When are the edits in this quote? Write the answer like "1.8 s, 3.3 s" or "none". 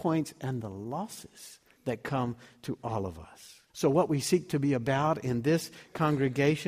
3.7 s